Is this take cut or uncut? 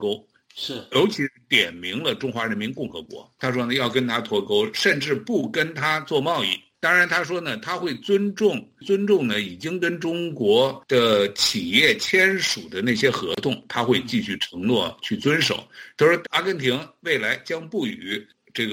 cut